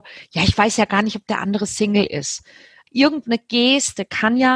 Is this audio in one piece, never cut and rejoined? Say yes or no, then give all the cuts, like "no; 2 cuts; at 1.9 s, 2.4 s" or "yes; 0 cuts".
no; 1 cut; at 2.9 s